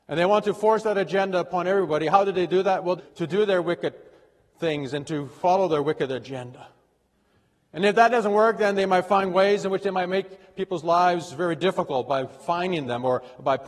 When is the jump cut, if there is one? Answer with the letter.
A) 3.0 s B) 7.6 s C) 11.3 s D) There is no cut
A